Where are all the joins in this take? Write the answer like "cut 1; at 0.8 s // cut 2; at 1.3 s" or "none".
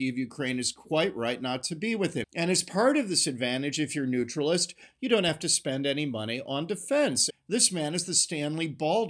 cut 1; at 2.2 s // cut 2; at 7.3 s